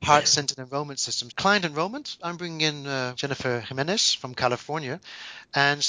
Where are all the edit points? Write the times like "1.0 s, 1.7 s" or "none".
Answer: 1.3 s, 3.1 s